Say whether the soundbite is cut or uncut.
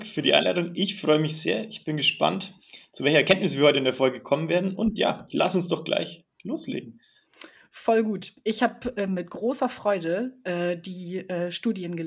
uncut